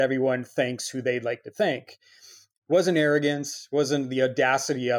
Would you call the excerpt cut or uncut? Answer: uncut